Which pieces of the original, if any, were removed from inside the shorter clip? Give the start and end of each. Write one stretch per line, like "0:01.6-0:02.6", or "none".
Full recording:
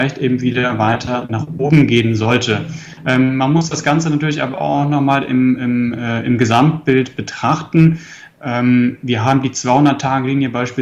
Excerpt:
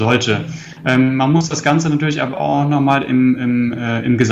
none